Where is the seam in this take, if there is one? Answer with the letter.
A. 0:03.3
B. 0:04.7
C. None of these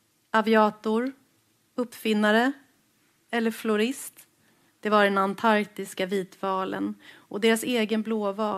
B